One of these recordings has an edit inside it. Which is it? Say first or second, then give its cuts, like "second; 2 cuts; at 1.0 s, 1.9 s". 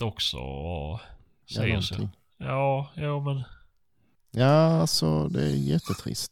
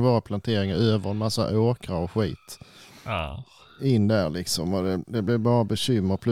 first; 2 cuts; at 1.4 s, 4.1 s